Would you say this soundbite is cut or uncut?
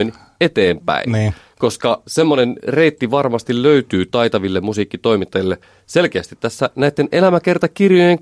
uncut